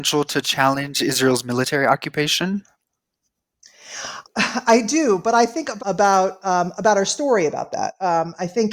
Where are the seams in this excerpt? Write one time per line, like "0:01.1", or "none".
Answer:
0:04.2
0:05.8